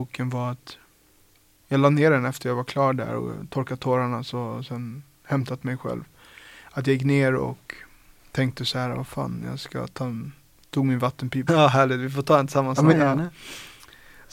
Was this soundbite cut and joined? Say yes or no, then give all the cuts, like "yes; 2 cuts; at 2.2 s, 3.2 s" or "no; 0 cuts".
yes; 2 cuts; at 11.5 s, 12.9 s